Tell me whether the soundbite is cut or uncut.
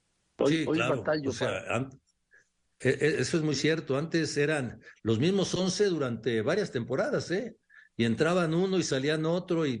uncut